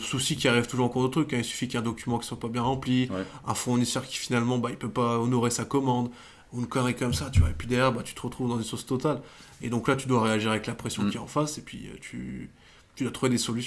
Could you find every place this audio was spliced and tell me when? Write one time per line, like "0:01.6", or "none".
none